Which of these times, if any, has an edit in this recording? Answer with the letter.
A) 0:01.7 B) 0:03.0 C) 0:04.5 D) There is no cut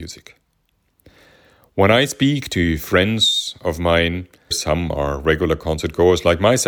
C